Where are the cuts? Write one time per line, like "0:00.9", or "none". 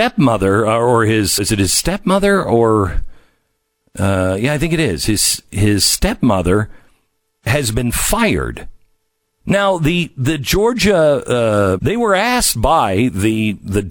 0:01.4
0:09.2
0:11.8